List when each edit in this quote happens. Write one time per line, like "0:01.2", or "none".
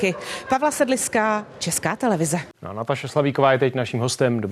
0:02.5